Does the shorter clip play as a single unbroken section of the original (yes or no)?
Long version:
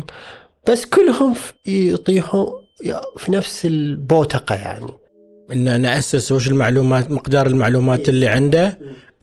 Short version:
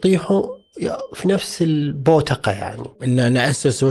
no